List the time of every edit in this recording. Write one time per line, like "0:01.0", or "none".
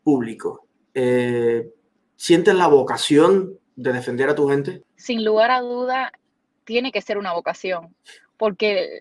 none